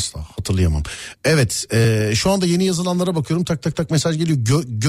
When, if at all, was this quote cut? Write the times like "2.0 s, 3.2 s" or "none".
none